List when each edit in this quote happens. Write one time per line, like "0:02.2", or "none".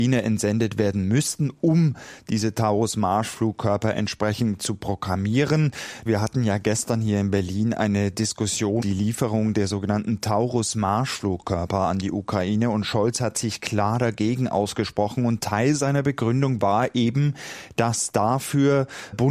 0:06.1
0:08.8